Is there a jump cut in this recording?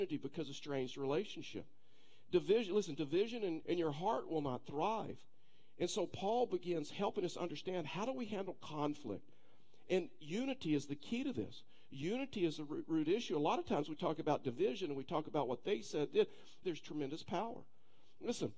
yes; 2 cuts; at 3.6 s, 16.6 s

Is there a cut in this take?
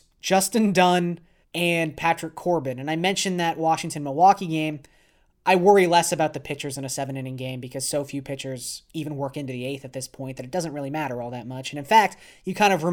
yes; 1 cut; at 1.4 s

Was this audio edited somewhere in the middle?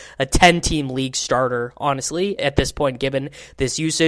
yes; 1 cut; at 2.4 s

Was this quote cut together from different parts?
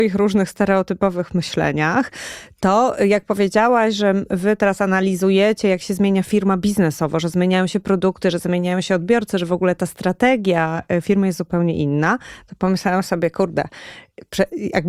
no; 0 cuts

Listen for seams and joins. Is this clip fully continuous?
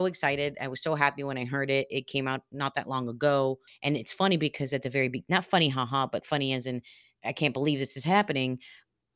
no; 2 cuts; at 3.7 s, 6.2 s

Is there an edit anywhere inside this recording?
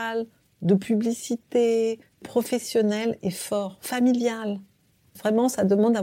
no; 0 cuts

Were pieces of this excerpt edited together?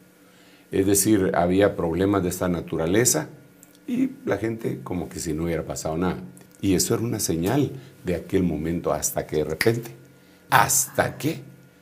yes; 2 cuts; at 6.5 s, 10.5 s

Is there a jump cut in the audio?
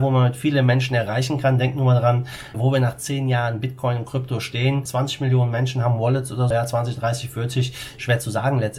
yes; 3 cuts; at 2.5 s, 4.9 s, 6.5 s

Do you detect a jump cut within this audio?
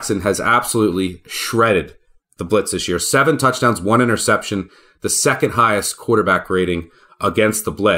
no; 0 cuts

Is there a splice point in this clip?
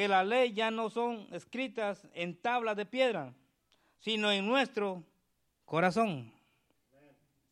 no; 0 cuts

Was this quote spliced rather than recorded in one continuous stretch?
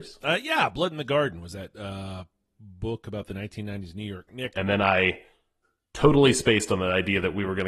yes; 1 cut; at 4.5 s

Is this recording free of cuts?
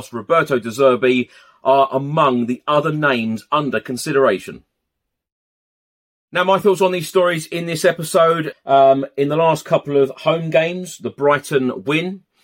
no; 1 cut; at 8.5 s

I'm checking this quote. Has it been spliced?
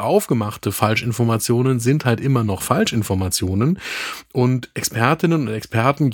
no; 0 cuts

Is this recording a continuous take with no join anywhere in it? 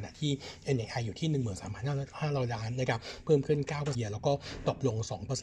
no; 1 cut; at 3.9 s

